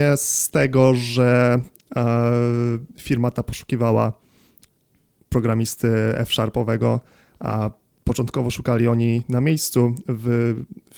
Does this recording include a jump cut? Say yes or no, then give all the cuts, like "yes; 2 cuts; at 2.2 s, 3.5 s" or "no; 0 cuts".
no; 0 cuts